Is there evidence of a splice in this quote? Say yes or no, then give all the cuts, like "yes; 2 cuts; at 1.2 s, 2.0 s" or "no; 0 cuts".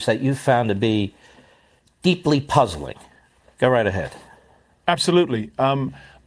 no; 0 cuts